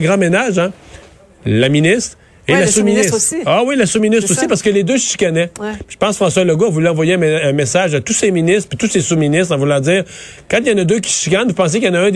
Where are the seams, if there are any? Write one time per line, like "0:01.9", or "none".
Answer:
none

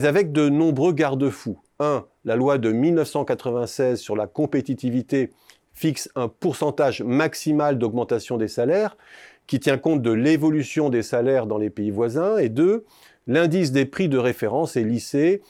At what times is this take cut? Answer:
none

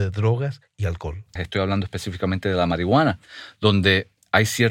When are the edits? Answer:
0:01.4

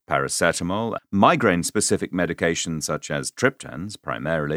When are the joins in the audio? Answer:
0:01.0

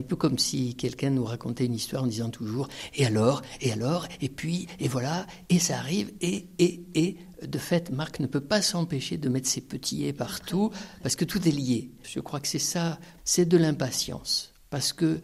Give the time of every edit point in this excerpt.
0:06.2
0:12.0
0:13.2

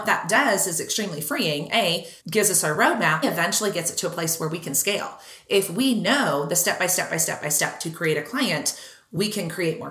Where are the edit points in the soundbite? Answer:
0:02.2
0:03.2

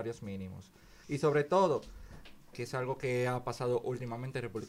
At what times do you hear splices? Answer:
0:01.0
0:02.5

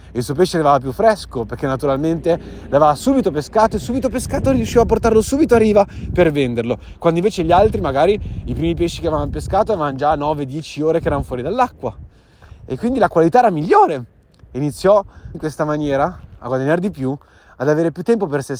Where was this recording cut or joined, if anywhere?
0:15.3

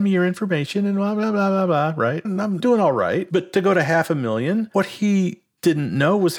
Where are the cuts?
0:02.2

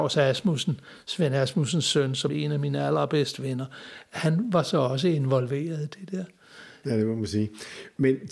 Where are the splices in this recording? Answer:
0:02.3
0:06.8

